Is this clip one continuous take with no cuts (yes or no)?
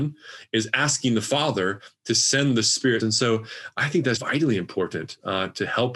no